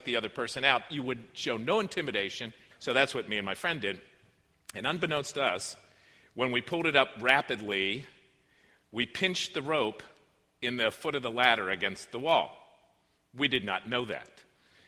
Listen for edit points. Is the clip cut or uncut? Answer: cut